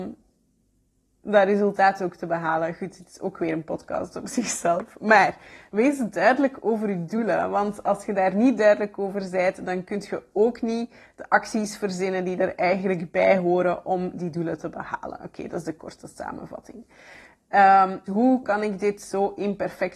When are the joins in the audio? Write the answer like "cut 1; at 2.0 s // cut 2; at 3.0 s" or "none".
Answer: cut 1; at 18.1 s